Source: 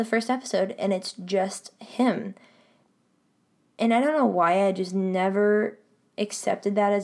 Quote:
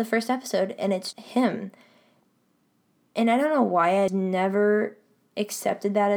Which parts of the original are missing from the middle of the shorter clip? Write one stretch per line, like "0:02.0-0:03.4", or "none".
0:01.1-0:01.8
0:04.7-0:04.9